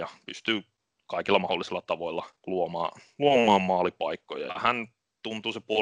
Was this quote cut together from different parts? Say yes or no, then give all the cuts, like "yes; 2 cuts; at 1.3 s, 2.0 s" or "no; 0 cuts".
yes; 2 cuts; at 2.4 s, 4.5 s